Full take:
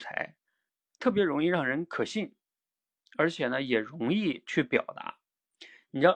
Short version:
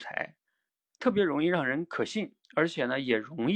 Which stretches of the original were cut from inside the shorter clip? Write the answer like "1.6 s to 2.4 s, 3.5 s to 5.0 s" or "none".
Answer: 2.4 s to 3.1 s